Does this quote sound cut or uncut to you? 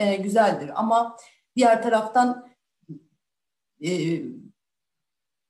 uncut